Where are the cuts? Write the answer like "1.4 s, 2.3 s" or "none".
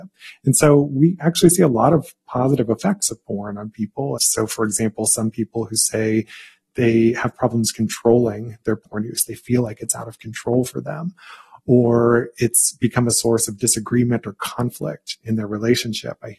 4.2 s